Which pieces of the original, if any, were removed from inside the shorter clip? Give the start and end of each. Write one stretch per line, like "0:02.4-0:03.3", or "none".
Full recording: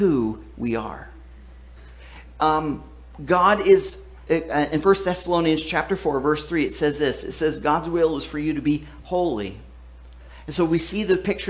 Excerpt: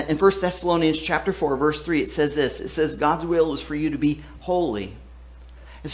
none